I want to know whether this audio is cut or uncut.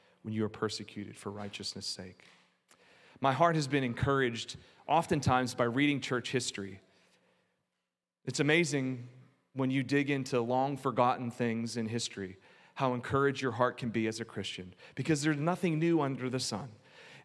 uncut